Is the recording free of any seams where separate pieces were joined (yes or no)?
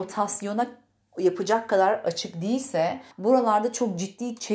no